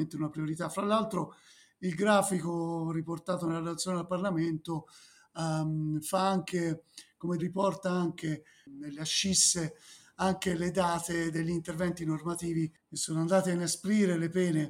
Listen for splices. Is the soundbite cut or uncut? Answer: cut